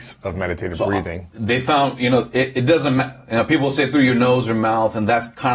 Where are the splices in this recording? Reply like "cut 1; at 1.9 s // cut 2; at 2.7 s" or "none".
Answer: none